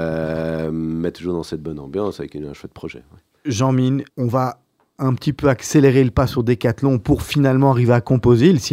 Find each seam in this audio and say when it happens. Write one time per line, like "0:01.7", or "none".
0:04.1